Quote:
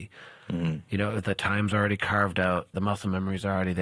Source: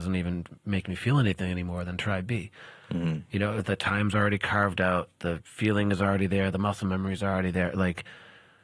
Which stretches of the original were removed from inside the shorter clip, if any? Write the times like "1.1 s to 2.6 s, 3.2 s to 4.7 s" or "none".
5.2 s to 6.5 s